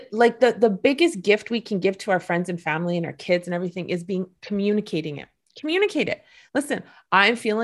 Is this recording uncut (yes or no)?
yes